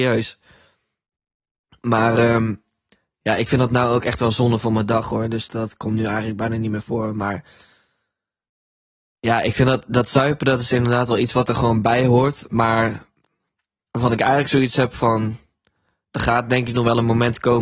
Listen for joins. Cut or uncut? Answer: cut